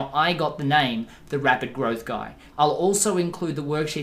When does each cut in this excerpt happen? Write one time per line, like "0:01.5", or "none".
0:02.5